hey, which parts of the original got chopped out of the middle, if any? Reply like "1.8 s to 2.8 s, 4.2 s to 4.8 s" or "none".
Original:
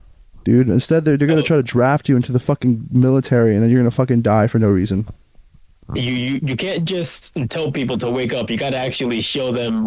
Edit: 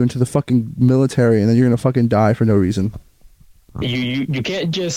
none